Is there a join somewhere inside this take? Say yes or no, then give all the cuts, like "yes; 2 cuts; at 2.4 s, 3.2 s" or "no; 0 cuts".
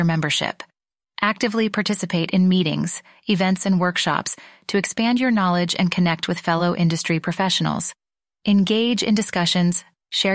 no; 0 cuts